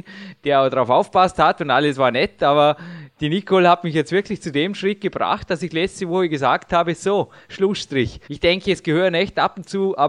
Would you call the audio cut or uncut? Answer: cut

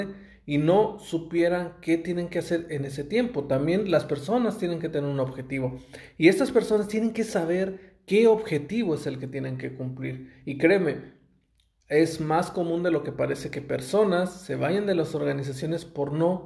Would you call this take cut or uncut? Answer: uncut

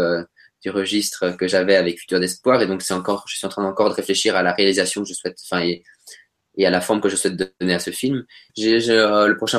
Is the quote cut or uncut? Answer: cut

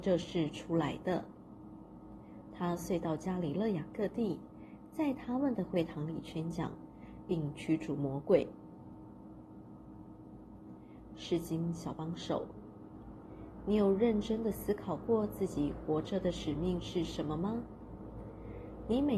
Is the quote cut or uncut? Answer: uncut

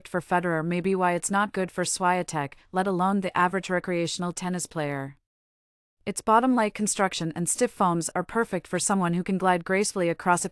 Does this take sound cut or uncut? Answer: uncut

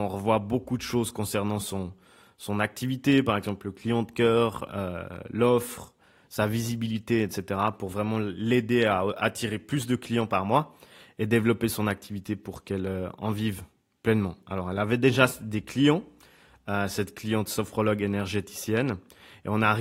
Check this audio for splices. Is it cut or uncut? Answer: uncut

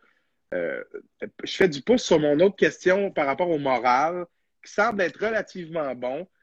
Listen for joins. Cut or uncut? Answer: uncut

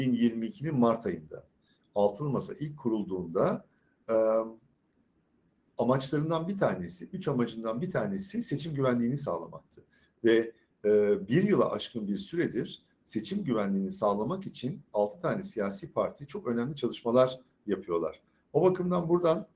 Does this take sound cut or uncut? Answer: uncut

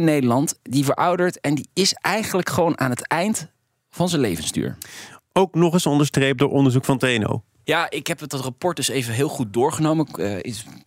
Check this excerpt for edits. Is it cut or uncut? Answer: uncut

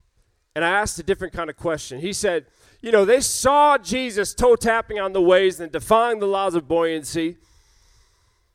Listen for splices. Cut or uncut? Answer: uncut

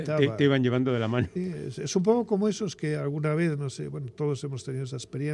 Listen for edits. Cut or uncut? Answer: cut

